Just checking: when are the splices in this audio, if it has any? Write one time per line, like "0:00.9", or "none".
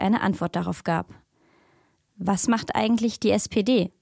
0:02.1

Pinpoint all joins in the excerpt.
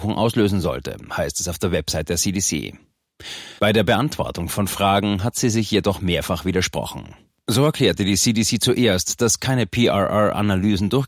0:03.6

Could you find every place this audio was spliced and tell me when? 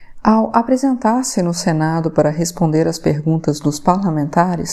none

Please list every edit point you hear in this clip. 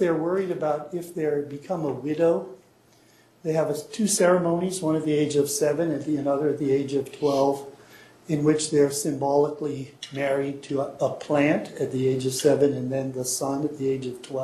0:11.0

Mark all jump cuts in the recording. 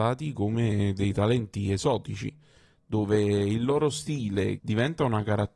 0:04.6

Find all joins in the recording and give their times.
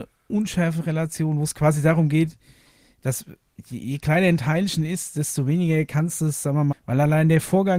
0:06.7

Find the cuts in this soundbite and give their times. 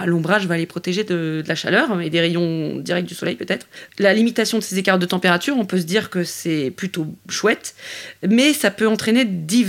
none

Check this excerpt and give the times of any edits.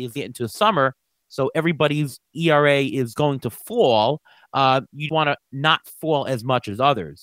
0:05.1

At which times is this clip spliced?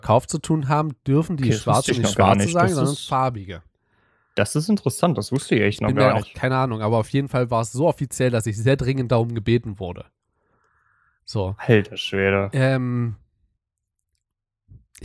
0:06.3

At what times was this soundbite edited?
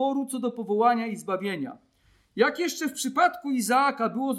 none

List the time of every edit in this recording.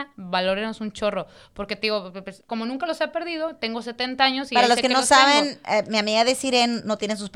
0:02.4

